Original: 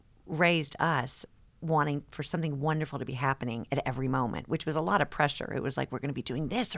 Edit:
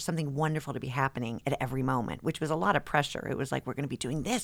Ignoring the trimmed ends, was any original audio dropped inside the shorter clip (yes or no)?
no